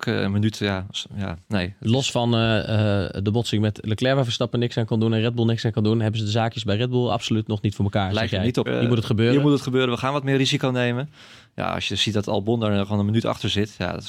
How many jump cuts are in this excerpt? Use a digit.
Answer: 1